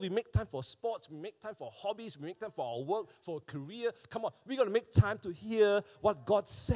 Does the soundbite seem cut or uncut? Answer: uncut